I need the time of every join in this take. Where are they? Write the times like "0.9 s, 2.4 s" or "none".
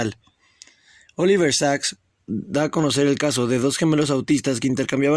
2.3 s